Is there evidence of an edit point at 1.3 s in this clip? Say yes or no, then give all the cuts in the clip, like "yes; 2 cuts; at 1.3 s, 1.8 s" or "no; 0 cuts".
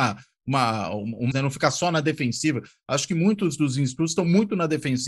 yes; 1 cut; at 1.3 s